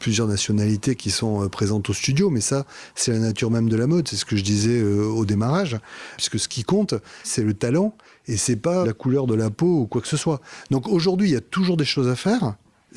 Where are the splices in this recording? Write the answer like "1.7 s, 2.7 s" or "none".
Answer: 6.2 s, 7.2 s, 8.8 s